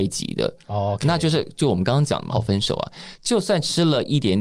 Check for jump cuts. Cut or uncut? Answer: cut